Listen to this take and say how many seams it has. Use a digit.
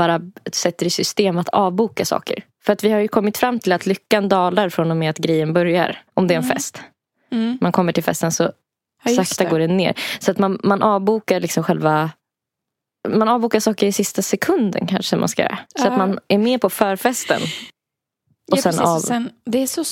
2